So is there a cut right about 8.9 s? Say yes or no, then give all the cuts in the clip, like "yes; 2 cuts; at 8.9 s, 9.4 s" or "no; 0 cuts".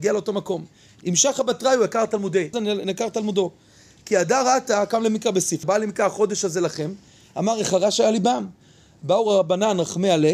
no; 2 cuts; at 2.5 s, 5.6 s